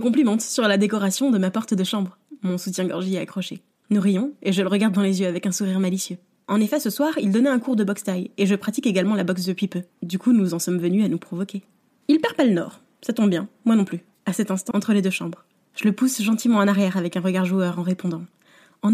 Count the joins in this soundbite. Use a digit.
2